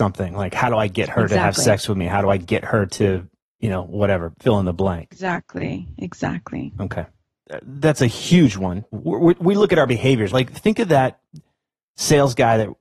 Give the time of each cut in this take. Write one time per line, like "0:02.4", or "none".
0:08.9
0:10.3